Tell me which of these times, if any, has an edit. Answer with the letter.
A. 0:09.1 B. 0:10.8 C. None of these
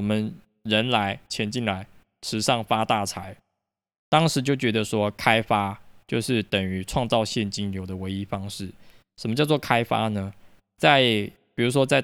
C